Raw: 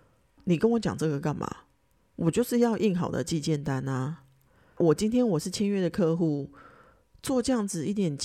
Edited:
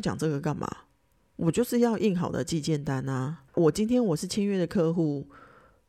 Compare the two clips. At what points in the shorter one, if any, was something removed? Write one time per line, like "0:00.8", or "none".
0:03.5